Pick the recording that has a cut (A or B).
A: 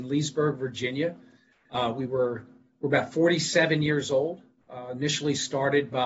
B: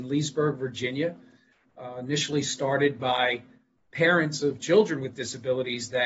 B